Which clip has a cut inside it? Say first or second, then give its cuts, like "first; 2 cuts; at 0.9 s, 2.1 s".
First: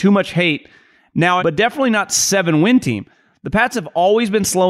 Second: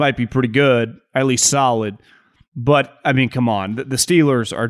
first; 1 cut; at 1.4 s